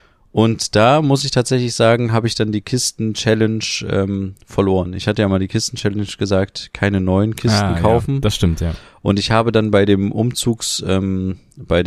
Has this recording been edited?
no; 0 cuts

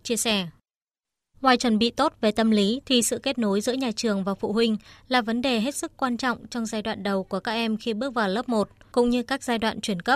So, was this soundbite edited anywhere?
yes; 2 cuts; at 1.3 s, 2.8 s

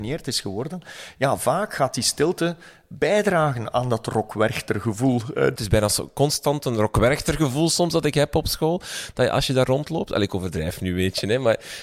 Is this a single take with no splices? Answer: no; 1 cut; at 5.6 s

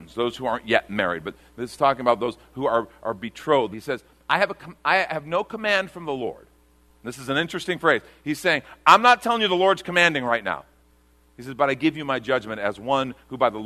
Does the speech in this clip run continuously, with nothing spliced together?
no; 1 cut; at 3.7 s

